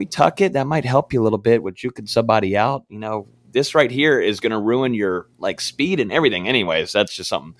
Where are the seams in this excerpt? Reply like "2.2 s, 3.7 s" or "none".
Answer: none

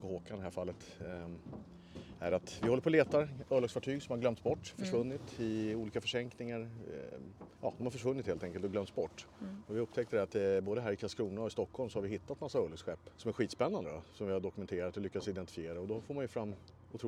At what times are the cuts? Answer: 7.5 s, 13.1 s

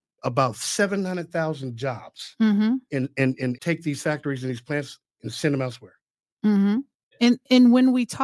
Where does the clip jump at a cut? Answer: 3.6 s, 7.1 s

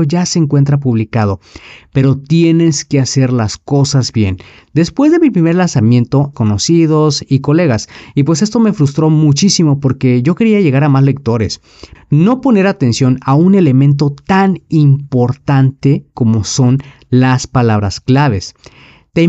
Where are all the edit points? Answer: 6.3 s, 12.0 s

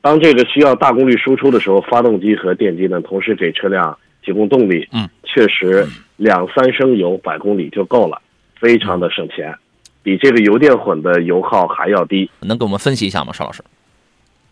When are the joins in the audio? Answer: 5.2 s, 12.4 s

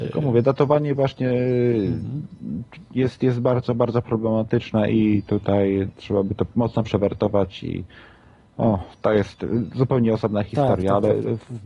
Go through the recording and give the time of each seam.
none

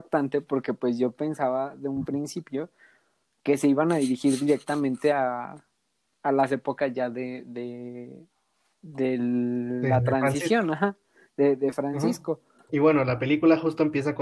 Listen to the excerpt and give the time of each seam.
12.7 s

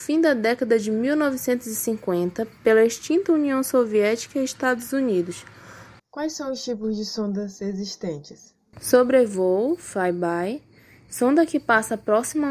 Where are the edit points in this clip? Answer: 6.0 s

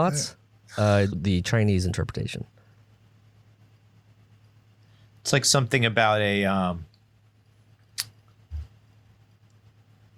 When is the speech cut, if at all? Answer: 1.1 s

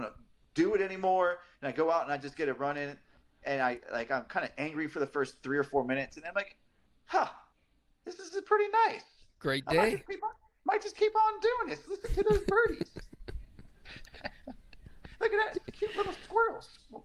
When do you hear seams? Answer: none

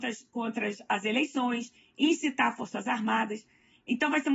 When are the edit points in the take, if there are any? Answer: none

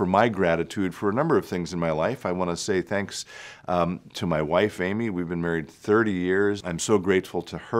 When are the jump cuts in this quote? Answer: 6.6 s

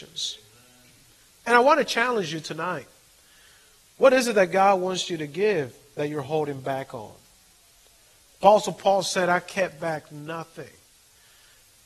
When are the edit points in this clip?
1.3 s

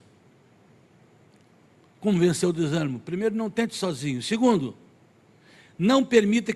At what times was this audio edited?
none

